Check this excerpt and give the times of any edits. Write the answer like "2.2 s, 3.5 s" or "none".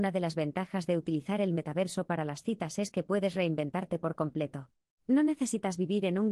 4.9 s